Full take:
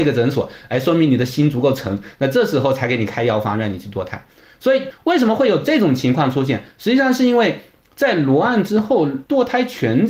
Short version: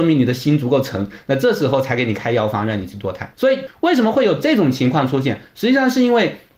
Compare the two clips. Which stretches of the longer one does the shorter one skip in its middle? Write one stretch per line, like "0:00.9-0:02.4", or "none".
0:04.2-0:04.6